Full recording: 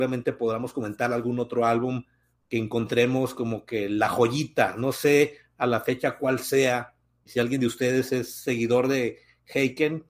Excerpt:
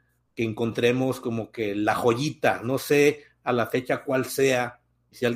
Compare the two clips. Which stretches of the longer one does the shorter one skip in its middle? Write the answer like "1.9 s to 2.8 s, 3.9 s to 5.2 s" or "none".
none